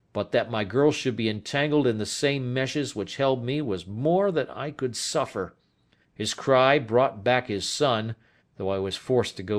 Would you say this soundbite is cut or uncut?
cut